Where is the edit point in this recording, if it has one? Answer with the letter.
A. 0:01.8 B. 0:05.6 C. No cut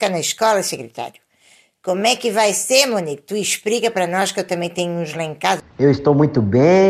B